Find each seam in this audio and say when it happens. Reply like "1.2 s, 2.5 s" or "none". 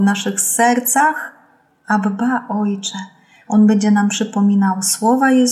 3.4 s